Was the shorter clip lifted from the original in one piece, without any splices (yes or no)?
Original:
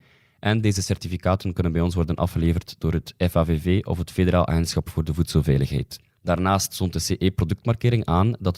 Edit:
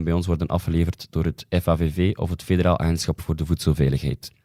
yes